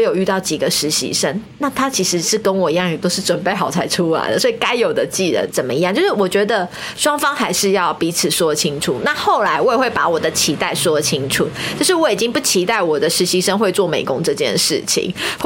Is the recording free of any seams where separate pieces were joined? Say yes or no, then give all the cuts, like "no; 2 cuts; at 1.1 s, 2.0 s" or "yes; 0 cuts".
no; 1 cut; at 5.5 s